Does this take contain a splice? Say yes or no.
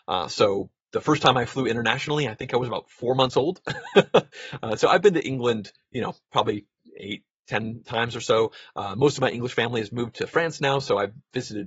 no